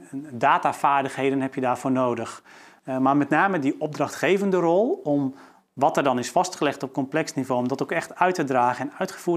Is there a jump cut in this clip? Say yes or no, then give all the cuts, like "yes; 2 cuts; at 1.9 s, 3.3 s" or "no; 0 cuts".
yes; 1 cut; at 2.8 s